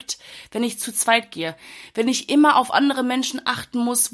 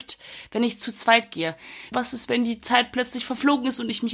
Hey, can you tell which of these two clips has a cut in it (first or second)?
second